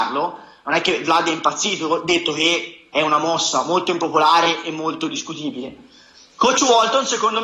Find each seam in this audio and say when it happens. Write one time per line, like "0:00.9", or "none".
none